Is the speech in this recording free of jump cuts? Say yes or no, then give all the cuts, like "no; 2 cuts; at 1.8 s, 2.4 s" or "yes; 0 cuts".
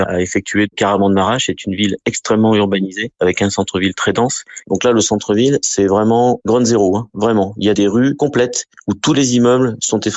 yes; 0 cuts